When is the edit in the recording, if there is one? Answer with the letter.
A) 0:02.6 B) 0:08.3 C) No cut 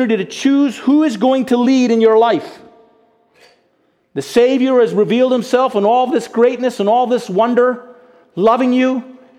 C